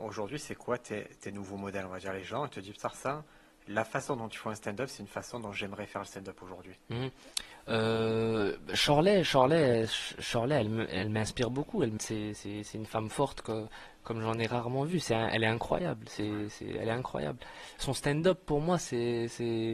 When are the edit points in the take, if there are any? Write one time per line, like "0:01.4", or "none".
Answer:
0:12.0